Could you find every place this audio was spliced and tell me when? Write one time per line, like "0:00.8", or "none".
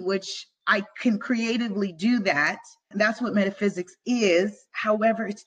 0:02.9